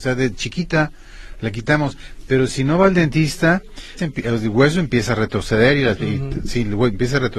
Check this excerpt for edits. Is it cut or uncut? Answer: cut